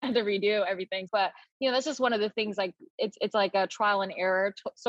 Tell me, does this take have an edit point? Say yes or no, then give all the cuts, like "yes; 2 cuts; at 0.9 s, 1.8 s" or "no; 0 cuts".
yes; 1 cut; at 1.1 s